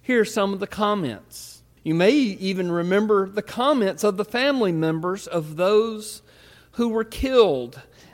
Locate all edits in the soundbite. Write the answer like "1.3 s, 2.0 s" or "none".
1.8 s